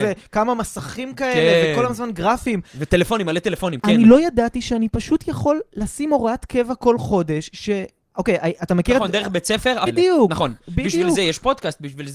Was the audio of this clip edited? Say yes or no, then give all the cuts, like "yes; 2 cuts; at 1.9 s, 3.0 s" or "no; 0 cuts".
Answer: yes; 2 cuts; at 8.1 s, 9.9 s